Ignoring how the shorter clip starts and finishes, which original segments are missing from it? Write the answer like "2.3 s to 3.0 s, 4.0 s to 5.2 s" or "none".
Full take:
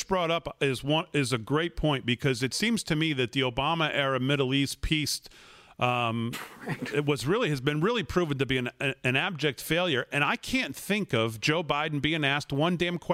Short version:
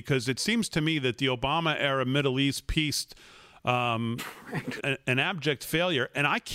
6.9 s to 8.7 s